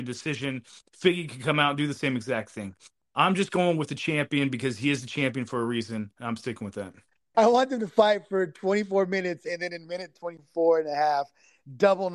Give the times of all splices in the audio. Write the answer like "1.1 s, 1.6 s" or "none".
7.3 s